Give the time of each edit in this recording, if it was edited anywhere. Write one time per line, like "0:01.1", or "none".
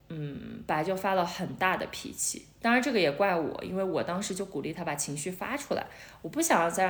none